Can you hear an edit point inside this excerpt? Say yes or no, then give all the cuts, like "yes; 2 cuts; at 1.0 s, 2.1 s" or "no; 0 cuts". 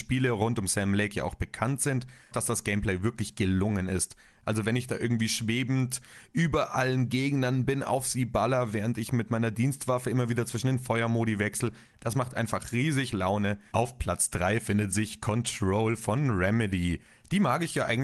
yes; 3 cuts; at 2.3 s, 11.9 s, 13.7 s